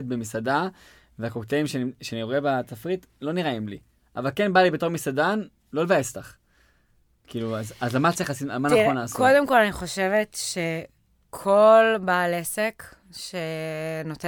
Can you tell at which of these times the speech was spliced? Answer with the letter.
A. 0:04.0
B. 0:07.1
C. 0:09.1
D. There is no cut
D